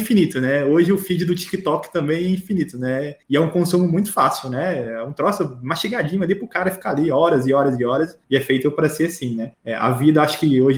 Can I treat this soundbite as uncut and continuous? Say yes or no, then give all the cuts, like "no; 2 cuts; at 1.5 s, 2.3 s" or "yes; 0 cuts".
yes; 0 cuts